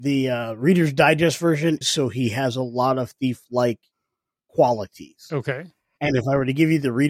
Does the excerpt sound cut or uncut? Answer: cut